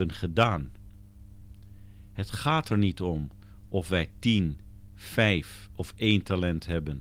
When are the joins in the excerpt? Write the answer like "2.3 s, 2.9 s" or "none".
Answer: none